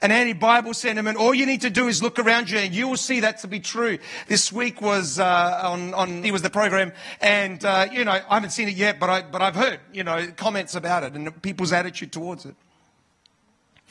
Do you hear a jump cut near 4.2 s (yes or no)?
no